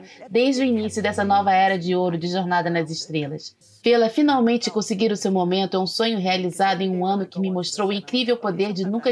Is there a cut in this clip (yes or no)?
no